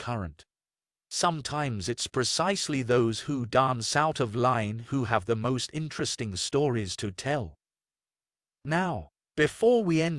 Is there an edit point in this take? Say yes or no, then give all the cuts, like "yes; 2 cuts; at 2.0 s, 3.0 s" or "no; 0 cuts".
no; 0 cuts